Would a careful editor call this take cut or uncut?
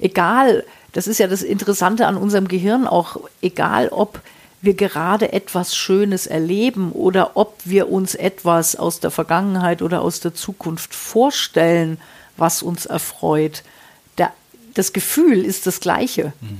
uncut